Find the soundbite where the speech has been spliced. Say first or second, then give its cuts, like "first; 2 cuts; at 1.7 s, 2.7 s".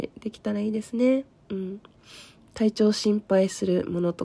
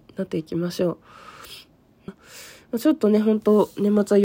second; 1 cut; at 2.1 s